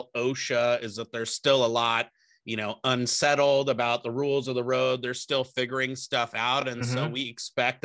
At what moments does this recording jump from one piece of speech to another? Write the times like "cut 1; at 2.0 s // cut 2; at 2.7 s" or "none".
none